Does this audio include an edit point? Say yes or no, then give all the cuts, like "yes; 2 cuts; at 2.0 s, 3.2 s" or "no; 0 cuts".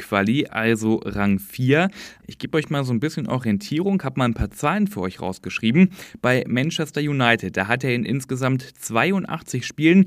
yes; 1 cut; at 2.2 s